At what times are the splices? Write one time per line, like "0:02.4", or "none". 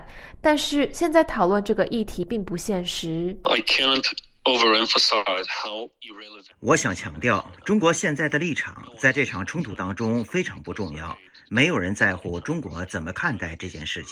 0:03.4